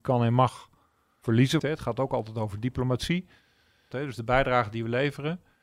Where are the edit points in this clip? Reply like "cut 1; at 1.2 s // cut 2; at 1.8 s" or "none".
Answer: cut 1; at 1.6 s // cut 2; at 3.9 s

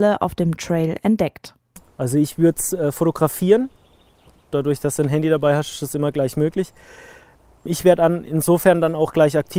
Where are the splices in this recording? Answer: none

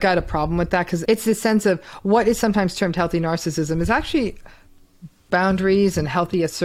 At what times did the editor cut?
cut 1; at 1.0 s

